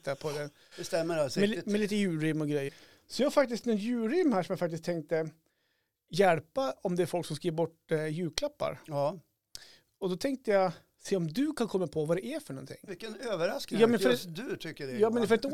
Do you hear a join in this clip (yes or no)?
yes